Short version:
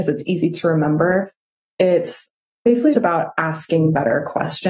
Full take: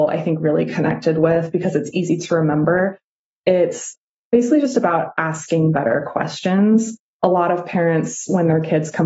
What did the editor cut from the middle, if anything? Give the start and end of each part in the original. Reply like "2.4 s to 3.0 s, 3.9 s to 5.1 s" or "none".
4.6 s to 4.7 s